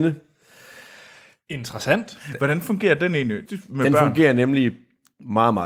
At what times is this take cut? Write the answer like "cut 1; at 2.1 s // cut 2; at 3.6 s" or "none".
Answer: cut 1; at 3.5 s